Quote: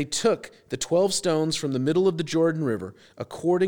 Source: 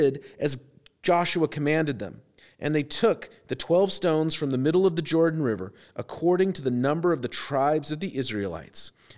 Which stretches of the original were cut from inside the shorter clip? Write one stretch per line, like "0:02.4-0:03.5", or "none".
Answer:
none